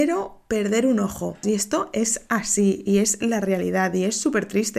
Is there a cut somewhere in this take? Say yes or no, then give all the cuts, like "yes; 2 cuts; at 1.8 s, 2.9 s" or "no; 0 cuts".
yes; 1 cut; at 1.4 s